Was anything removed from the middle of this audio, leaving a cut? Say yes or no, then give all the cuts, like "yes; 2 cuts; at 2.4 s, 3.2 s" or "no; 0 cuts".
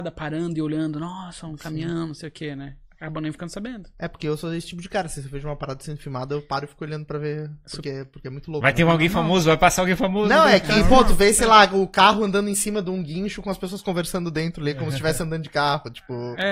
no; 0 cuts